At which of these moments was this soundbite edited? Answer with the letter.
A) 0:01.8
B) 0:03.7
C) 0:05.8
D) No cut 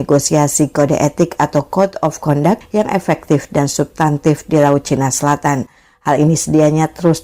D